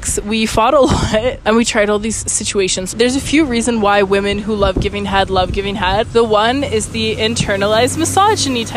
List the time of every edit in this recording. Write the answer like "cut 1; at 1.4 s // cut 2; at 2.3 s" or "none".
cut 1; at 1.4 s // cut 2; at 2.9 s // cut 3; at 6.0 s